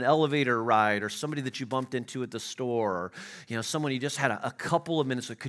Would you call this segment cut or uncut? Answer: uncut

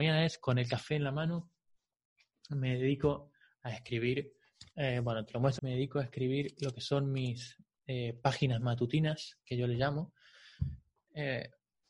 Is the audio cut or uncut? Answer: cut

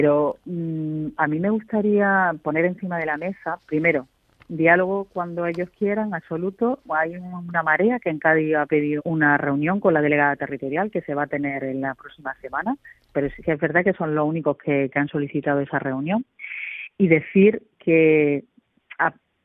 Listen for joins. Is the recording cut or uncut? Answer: cut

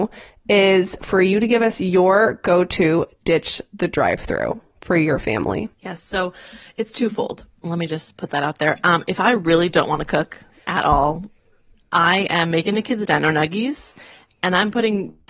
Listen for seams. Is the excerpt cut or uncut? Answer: cut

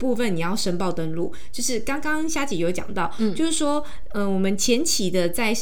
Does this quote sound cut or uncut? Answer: uncut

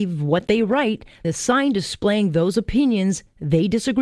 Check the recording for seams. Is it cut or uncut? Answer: cut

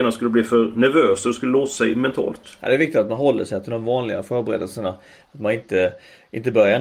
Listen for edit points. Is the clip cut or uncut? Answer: uncut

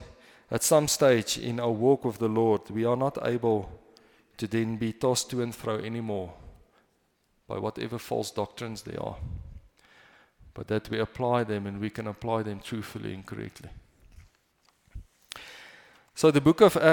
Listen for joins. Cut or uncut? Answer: uncut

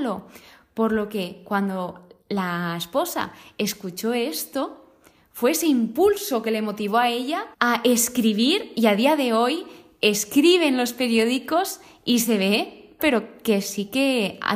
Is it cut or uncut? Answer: cut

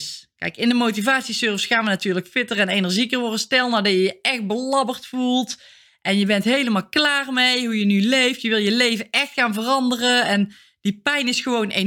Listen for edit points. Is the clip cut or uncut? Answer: uncut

